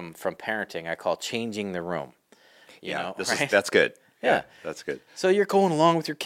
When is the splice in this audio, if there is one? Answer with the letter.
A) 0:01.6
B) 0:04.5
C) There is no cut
C